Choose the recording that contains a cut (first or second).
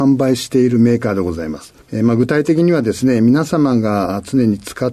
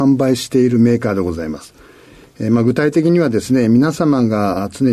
first